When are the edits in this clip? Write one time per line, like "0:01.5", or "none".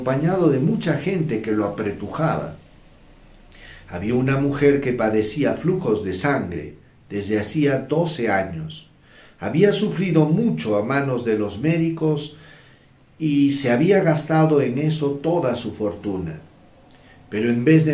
none